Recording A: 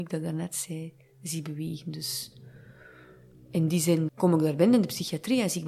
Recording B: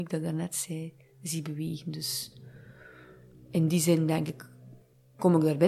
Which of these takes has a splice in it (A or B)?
A